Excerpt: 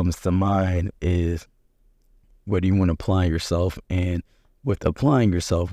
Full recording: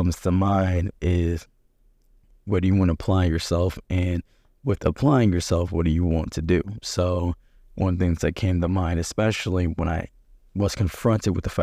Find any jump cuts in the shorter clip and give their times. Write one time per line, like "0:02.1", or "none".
none